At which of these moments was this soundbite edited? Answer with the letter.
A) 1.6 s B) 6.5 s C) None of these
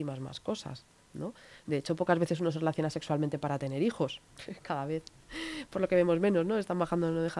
C